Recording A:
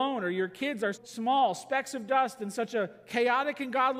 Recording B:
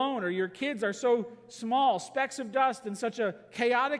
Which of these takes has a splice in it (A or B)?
A